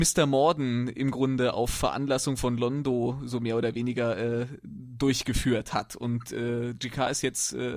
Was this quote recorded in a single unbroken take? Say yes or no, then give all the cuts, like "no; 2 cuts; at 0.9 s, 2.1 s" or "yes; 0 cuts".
yes; 0 cuts